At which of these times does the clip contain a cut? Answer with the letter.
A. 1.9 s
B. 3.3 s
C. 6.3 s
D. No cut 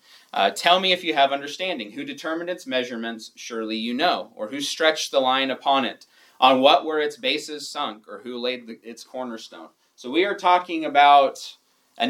D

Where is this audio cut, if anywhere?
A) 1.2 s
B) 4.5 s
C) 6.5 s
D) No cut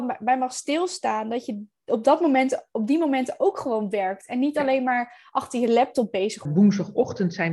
C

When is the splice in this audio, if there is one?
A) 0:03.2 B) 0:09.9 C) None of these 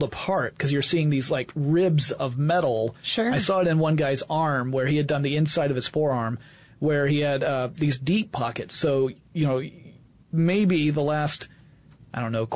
C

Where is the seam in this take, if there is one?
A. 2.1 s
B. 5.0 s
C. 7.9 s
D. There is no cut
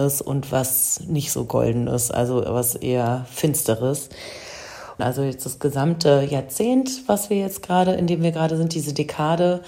B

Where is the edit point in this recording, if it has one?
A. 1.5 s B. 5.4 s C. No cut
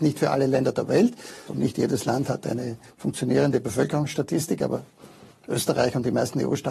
A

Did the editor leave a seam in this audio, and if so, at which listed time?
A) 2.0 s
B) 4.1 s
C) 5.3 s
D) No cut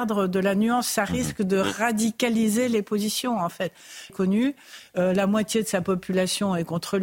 B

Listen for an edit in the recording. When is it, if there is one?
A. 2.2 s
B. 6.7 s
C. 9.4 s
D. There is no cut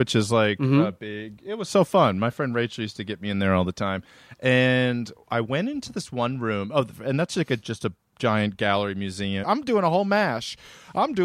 C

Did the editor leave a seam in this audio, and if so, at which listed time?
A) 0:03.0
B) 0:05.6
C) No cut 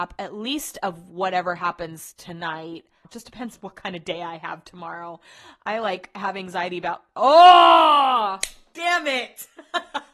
A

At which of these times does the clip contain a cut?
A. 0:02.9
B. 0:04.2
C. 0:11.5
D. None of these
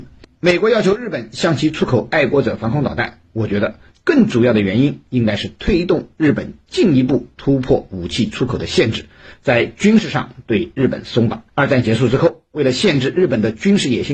C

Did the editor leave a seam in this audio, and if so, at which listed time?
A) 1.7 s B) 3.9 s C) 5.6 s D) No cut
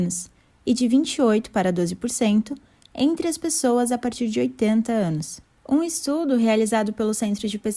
C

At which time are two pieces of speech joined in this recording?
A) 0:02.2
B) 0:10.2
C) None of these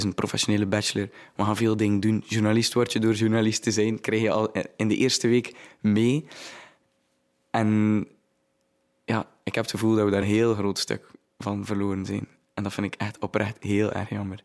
B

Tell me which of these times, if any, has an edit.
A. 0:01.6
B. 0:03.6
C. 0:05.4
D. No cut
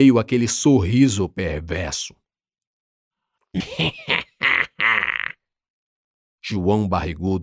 B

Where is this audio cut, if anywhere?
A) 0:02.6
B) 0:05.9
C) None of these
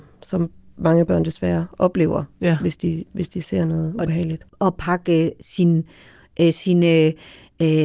C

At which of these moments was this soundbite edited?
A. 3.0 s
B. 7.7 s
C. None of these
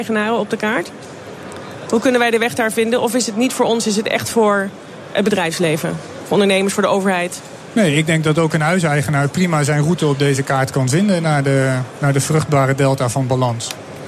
C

